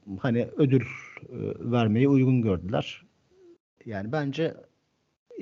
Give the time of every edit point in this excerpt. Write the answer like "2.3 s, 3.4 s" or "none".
3.8 s